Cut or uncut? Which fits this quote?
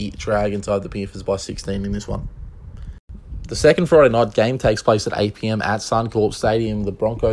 uncut